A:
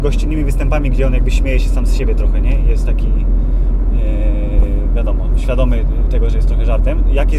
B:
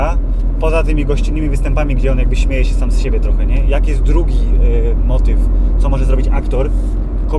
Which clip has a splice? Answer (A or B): B